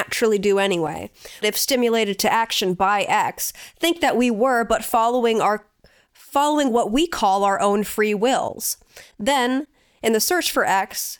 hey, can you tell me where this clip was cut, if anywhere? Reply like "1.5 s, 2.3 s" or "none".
1.4 s